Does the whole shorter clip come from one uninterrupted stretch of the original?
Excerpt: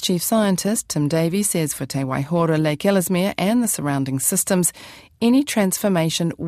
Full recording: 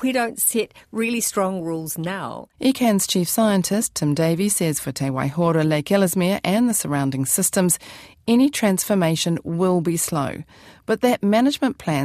yes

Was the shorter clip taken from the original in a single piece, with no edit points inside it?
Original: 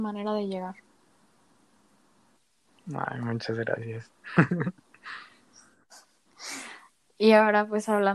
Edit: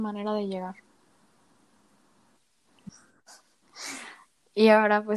no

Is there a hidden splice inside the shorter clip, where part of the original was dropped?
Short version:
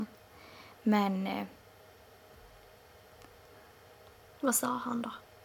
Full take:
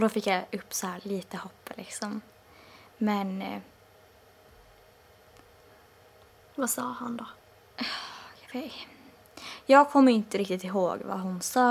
no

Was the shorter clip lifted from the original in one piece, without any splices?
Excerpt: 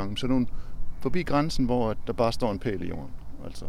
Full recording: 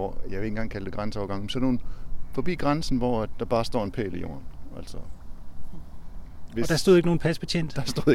yes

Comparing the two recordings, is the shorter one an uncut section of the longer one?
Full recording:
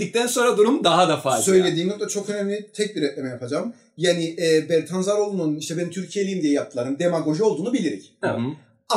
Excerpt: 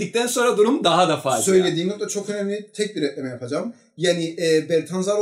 yes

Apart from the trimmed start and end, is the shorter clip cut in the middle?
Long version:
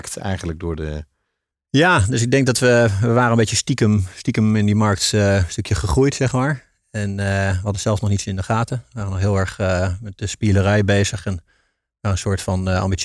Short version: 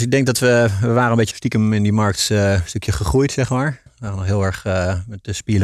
yes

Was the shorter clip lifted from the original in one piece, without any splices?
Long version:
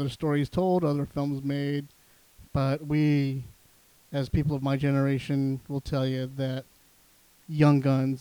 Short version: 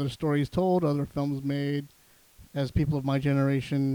no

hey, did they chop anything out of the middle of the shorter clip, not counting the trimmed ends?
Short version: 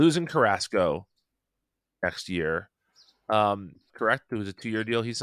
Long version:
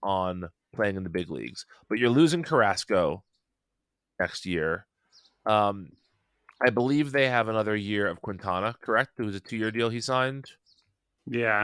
yes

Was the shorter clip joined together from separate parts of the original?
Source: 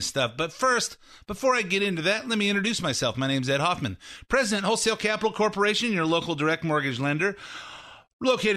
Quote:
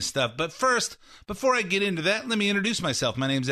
no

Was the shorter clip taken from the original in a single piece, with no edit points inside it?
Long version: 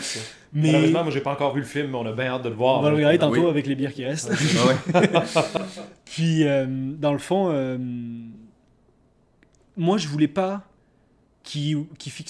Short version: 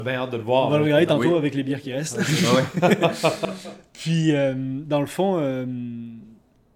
yes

